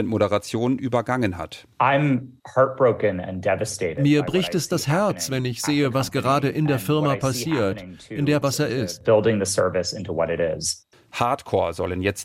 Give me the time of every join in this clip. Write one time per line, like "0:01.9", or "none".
0:08.4
0:10.9

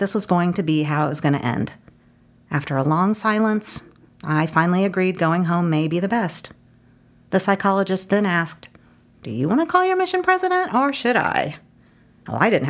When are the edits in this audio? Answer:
none

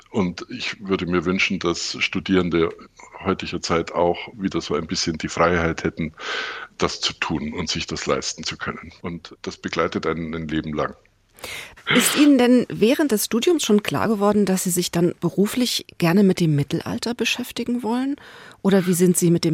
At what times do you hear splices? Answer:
0:09.0

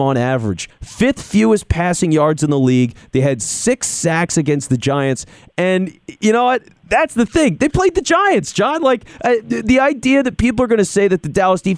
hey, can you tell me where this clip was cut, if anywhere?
none

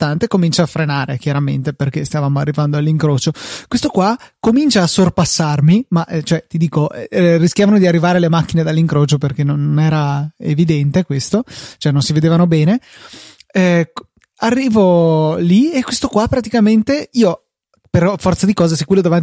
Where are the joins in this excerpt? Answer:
none

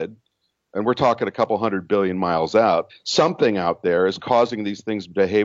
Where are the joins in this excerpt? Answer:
0:02.9

